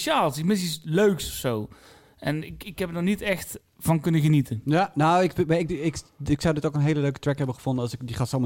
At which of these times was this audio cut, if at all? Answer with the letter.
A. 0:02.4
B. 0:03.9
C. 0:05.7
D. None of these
D